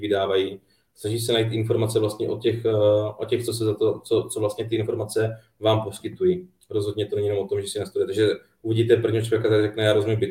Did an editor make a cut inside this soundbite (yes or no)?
no